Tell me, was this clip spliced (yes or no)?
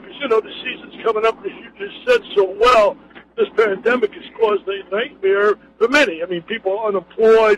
no